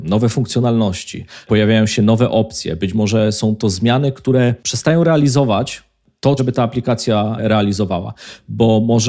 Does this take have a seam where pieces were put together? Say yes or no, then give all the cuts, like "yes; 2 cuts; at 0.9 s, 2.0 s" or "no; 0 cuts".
yes; 1 cut; at 6.4 s